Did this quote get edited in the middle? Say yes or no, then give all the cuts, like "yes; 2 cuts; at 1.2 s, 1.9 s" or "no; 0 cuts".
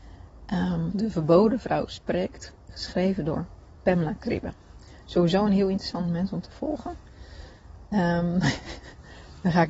yes; 1 cut; at 0.9 s